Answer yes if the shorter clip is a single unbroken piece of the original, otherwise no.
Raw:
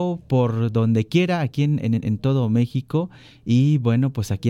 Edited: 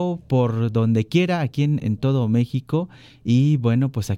no